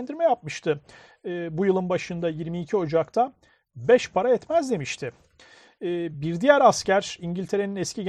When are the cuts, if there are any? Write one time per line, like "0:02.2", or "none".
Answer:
none